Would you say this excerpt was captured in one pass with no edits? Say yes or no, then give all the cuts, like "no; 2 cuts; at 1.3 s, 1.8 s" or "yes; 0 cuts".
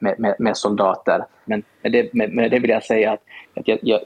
no; 1 cut; at 1.5 s